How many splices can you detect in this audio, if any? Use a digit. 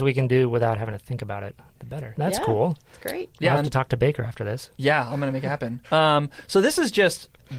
1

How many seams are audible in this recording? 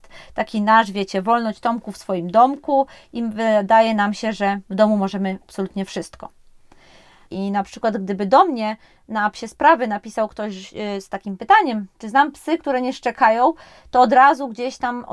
1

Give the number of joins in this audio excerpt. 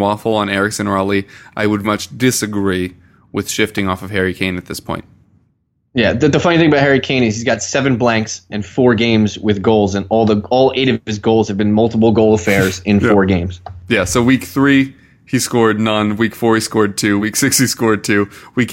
2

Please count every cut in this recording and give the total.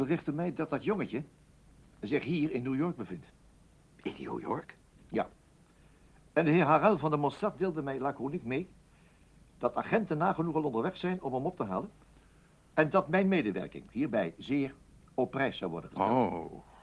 0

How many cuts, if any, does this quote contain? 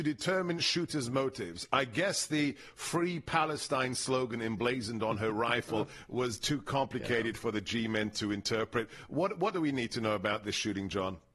0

